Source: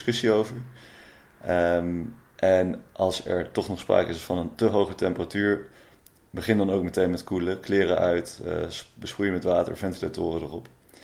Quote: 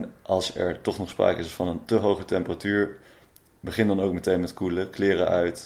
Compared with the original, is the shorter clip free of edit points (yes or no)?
yes